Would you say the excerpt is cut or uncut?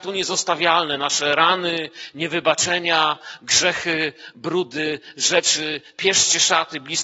uncut